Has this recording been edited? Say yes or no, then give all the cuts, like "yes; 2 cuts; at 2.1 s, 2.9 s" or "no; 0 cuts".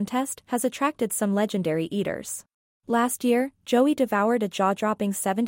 yes; 1 cut; at 2.8 s